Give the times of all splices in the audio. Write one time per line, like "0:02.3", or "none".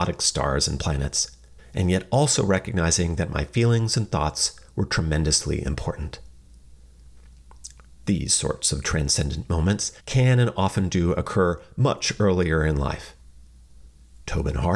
0:01.6
0:10.0